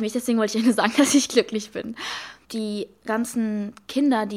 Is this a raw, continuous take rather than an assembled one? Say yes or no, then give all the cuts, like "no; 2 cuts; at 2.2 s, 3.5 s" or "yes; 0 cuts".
no; 1 cut; at 2.4 s